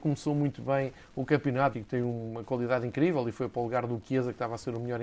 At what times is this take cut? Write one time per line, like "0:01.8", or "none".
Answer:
0:01.7